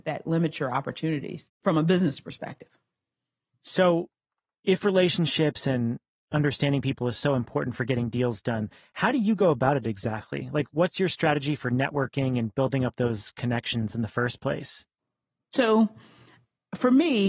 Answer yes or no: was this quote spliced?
no